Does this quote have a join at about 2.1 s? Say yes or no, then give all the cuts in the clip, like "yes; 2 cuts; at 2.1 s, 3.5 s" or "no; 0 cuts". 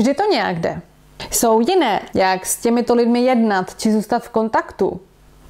yes; 1 cut; at 2.1 s